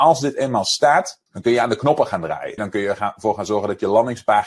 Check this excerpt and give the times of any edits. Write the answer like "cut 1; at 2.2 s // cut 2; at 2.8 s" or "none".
cut 1; at 1.3 s // cut 2; at 2.6 s